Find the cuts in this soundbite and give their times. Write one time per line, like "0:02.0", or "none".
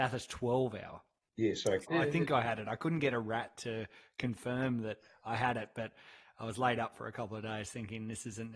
0:01.8